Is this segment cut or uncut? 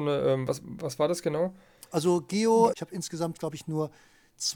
cut